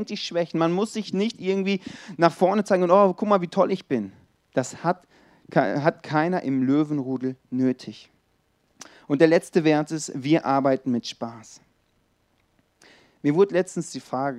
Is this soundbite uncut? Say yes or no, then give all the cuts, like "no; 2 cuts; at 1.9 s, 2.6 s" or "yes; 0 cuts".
yes; 0 cuts